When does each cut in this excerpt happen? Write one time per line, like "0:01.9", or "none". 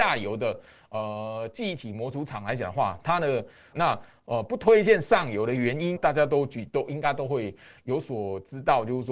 0:03.7
0:06.0